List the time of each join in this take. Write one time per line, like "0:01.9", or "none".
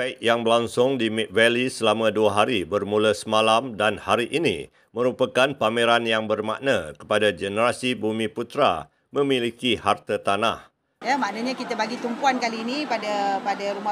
0:11.0